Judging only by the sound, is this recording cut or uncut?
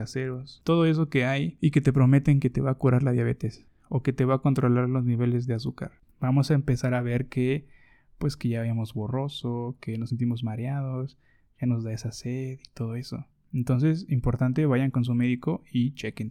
cut